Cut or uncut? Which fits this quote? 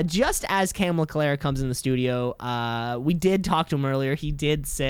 uncut